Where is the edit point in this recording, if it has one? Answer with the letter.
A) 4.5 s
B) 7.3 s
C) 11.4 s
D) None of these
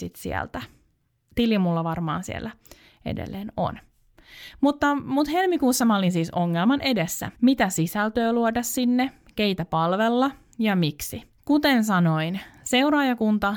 B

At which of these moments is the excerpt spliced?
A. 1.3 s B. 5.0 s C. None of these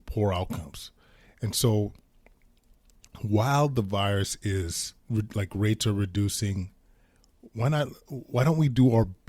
B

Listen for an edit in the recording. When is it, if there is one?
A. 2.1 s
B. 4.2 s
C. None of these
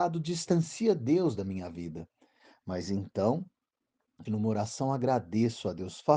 B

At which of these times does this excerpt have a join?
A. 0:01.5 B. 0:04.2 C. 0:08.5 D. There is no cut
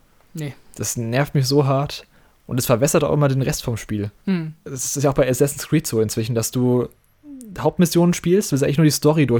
B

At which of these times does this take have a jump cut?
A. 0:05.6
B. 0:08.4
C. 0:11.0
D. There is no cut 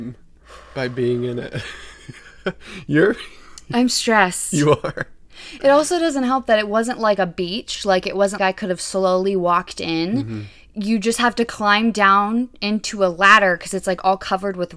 B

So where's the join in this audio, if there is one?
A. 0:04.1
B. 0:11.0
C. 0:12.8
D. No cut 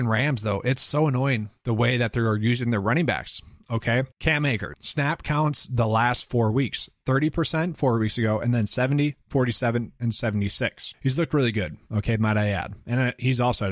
D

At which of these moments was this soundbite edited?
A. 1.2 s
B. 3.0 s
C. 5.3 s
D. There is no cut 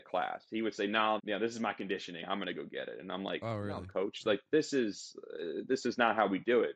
A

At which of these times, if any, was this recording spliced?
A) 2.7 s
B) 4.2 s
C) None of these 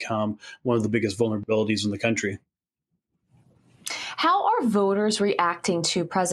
C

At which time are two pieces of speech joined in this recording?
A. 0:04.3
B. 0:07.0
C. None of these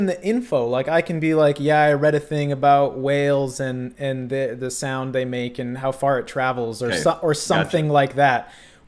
C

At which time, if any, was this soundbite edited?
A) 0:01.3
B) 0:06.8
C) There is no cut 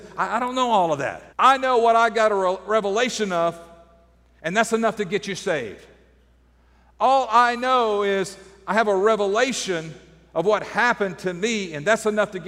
A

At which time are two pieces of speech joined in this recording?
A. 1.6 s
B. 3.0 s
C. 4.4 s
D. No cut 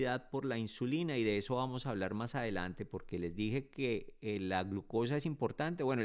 D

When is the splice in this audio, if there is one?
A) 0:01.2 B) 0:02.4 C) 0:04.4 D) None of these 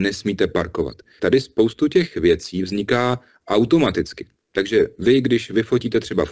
A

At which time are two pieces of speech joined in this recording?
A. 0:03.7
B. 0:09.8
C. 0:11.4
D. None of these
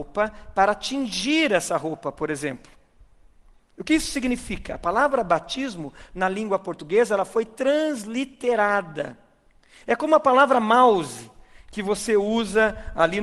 D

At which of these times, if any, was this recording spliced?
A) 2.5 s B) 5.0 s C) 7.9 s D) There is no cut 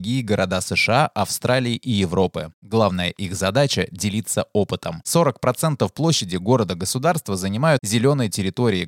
B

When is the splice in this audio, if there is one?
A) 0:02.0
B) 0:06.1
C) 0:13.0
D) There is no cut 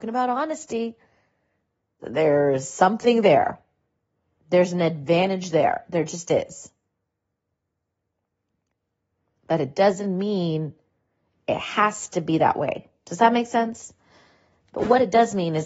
A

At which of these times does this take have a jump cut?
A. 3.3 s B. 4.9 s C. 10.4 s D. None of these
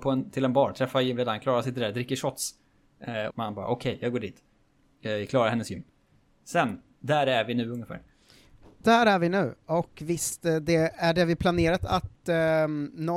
A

